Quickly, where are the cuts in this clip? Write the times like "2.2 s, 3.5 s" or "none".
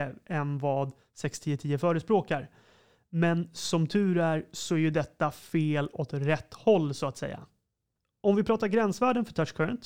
none